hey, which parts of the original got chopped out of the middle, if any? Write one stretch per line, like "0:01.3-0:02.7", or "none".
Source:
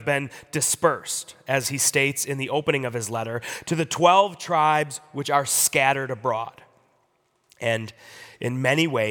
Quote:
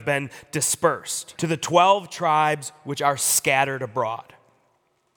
0:01.4-0:03.6